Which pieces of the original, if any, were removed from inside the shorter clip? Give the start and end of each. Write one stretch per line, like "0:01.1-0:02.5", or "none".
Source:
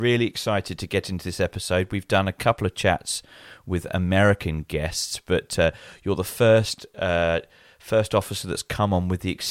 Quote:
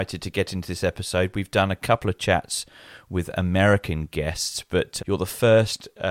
0:05.6-0:06.0